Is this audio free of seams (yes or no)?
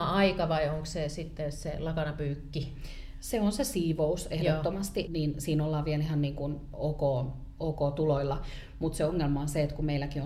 no